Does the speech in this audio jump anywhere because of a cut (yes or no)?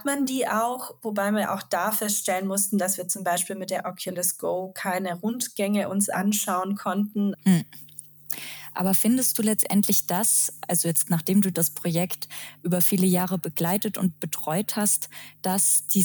yes